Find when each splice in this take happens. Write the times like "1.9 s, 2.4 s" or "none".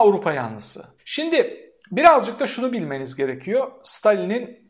1.0 s